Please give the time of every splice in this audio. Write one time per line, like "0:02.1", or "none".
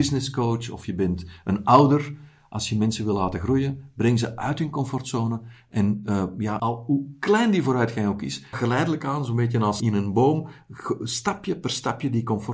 0:06.6
0:08.5
0:09.8